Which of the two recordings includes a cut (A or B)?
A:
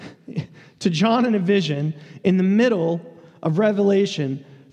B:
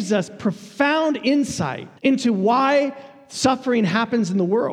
B